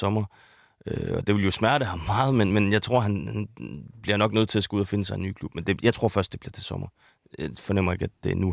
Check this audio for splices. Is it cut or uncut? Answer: uncut